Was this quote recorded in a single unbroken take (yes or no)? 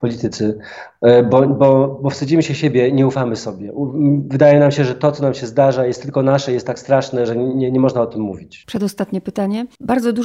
yes